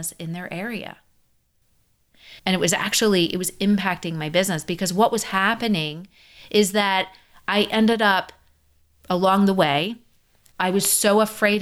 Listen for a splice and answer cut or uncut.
cut